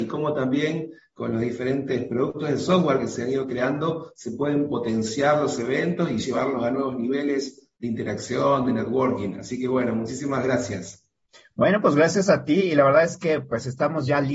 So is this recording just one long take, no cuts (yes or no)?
yes